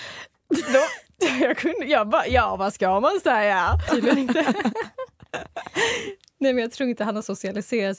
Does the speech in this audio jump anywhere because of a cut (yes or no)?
yes